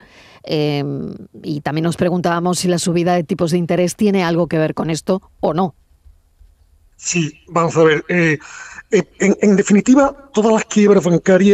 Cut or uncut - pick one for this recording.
uncut